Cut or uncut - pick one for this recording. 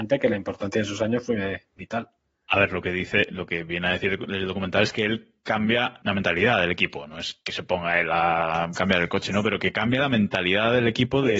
cut